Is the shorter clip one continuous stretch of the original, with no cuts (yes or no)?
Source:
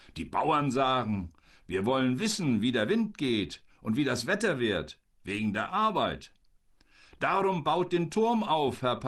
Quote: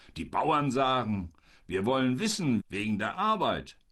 no